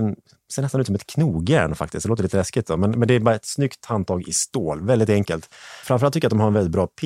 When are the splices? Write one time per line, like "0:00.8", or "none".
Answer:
0:05.8